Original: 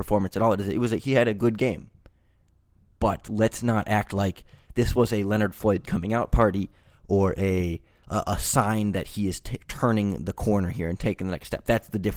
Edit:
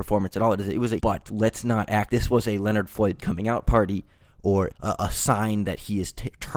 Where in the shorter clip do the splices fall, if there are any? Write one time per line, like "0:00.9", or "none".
0:01.0
0:02.1
0:04.7